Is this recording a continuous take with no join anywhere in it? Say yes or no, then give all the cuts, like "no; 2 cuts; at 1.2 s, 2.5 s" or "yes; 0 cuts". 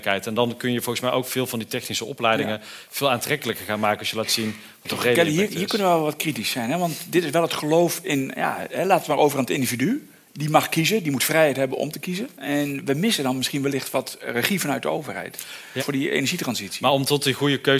no; 1 cut; at 15.8 s